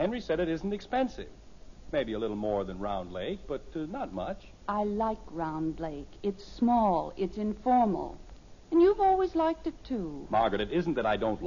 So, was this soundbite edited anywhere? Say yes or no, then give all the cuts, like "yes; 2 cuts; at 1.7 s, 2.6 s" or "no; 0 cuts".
no; 0 cuts